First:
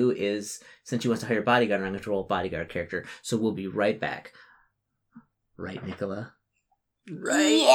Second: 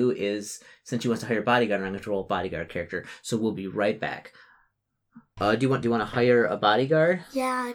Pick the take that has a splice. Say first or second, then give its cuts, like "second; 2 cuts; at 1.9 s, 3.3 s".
second; 1 cut; at 5.4 s